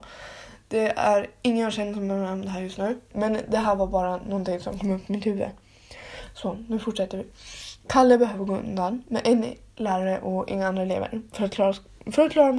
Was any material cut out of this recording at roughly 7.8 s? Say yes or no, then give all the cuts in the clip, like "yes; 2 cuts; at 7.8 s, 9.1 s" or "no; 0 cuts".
no; 1 cut; at 3.1 s